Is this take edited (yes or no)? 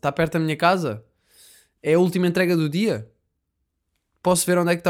no